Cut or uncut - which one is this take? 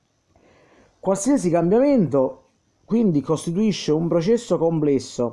uncut